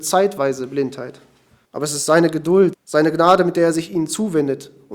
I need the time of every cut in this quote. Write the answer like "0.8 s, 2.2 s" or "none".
1.6 s, 2.7 s

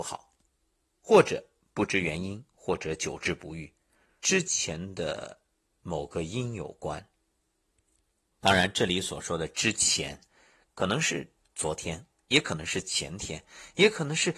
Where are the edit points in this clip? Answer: 4.2 s

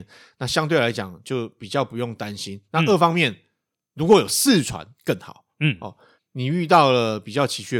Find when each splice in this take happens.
6.2 s

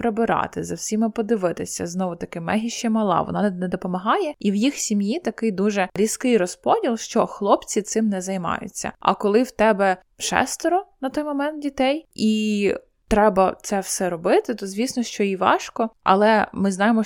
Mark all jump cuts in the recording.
15.9 s

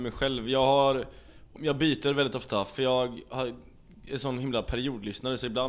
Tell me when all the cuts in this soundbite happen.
1.6 s

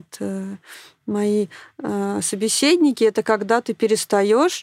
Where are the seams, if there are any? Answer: none

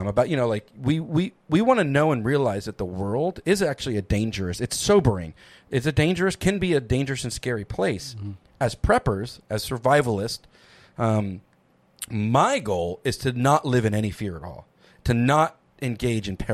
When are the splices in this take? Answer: none

